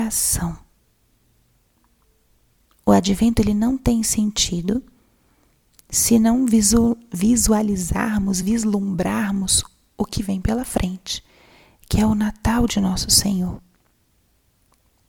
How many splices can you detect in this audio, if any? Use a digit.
0